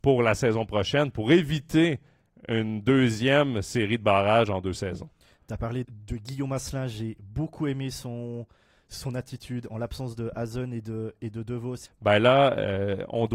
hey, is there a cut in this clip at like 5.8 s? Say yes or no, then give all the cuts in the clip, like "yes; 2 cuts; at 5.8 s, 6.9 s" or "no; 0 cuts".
yes; 2 cuts; at 5.8 s, 11.9 s